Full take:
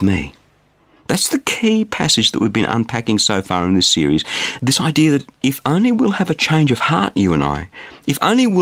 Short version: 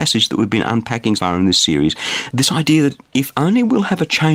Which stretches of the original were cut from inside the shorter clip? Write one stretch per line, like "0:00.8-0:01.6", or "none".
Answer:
0:03.2-0:03.4